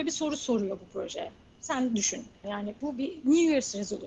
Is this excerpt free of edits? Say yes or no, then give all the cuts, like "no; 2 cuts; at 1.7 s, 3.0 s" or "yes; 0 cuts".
no; 1 cut; at 2.4 s